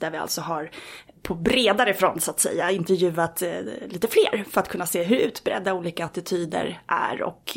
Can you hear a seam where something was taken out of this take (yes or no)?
yes